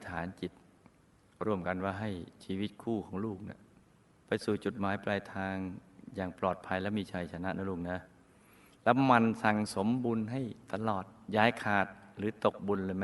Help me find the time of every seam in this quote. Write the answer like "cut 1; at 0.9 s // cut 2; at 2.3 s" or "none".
none